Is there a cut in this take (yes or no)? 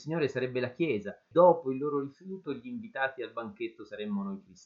yes